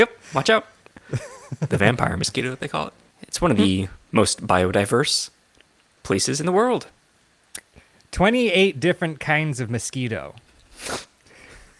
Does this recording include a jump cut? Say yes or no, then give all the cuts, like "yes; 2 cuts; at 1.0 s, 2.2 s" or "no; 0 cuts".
yes; 1 cut; at 3.1 s